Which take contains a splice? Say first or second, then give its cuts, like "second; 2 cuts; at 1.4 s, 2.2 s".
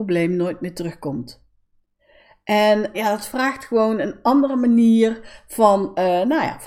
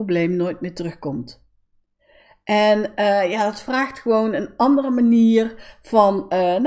first; 1 cut; at 2.9 s